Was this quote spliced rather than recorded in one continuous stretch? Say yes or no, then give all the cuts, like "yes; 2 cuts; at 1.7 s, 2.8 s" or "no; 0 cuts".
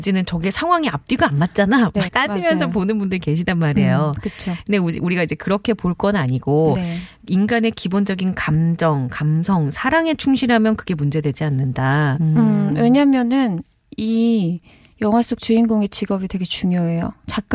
yes; 2 cuts; at 2.1 s, 12.1 s